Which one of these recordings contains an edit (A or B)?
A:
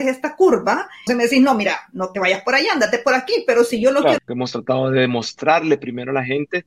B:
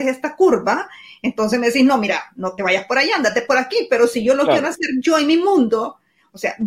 A